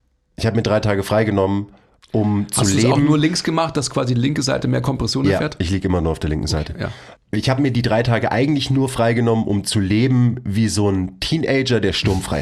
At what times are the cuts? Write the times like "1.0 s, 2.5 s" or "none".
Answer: 7.2 s